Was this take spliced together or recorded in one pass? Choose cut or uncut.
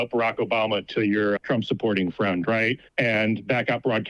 cut